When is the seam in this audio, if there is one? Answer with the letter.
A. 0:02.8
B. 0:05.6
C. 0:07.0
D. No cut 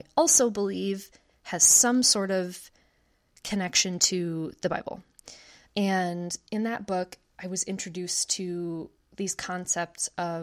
B